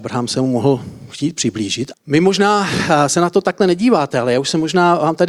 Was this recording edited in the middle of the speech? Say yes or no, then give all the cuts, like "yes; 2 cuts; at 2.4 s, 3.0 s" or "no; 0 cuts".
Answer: yes; 1 cut; at 1.9 s